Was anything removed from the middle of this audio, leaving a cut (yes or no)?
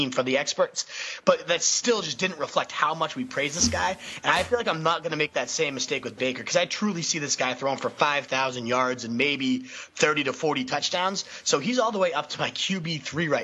no